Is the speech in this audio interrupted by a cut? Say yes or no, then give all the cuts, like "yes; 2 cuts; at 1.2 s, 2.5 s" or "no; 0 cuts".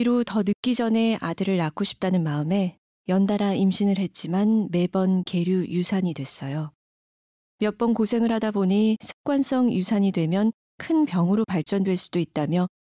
no; 0 cuts